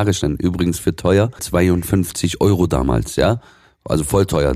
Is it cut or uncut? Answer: cut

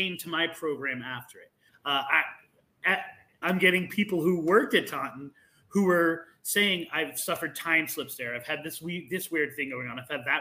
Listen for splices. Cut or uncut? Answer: cut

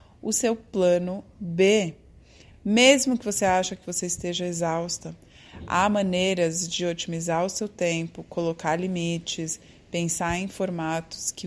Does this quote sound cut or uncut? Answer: uncut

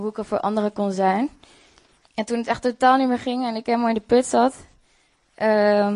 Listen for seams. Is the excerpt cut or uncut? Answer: cut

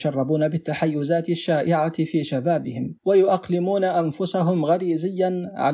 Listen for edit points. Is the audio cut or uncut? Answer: cut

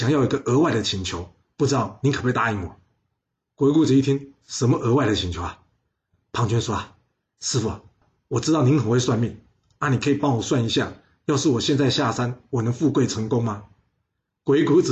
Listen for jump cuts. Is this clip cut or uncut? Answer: uncut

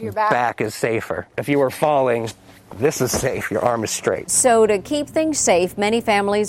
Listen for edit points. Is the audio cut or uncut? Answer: cut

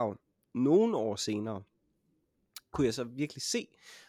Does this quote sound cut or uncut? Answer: uncut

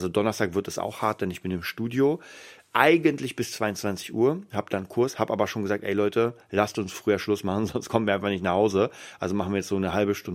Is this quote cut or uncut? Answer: uncut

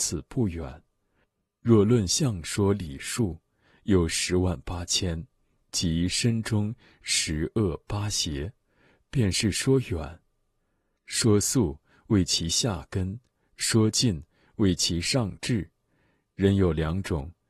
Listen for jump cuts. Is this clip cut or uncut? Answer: uncut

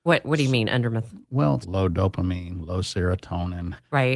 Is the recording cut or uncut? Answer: cut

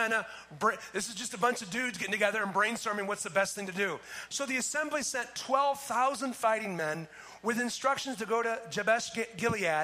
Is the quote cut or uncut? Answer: cut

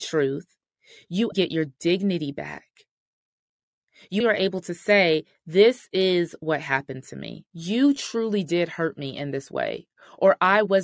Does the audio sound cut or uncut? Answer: cut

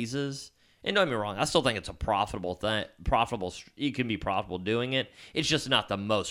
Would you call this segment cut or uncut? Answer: uncut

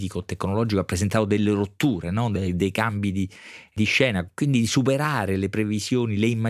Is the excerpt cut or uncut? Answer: uncut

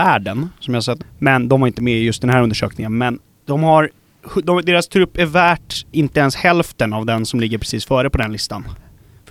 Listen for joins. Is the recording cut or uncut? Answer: cut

